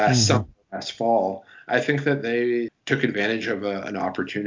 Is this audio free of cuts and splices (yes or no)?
no